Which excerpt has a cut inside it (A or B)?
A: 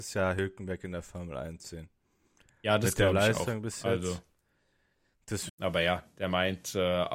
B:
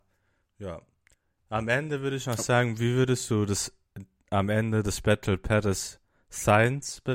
A